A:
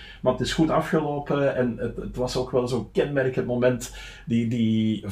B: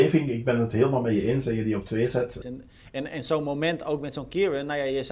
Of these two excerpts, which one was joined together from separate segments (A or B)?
B